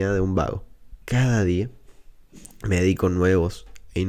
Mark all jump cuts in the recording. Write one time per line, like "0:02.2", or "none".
0:01.0